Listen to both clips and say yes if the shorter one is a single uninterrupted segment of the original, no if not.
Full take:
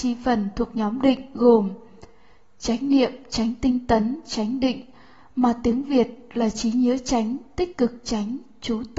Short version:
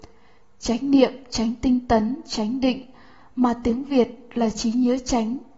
yes